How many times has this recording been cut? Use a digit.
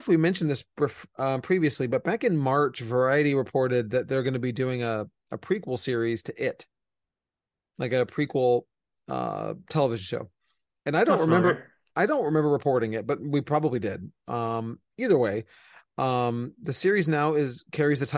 0